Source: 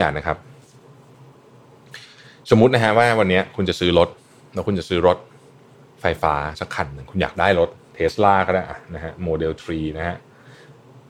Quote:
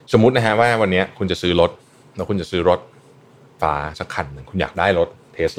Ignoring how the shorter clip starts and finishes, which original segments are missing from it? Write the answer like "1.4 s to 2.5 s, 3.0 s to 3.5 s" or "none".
6.0 s to 6.2 s